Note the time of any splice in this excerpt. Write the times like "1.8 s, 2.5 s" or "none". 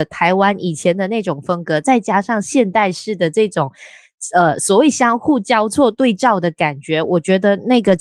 none